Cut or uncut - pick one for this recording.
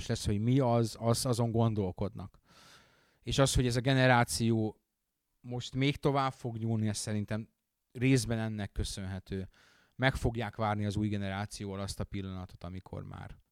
uncut